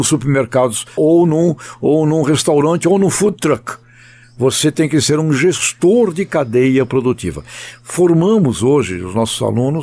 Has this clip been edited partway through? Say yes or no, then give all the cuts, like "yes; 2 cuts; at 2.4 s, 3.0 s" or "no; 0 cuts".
yes; 1 cut; at 1.0 s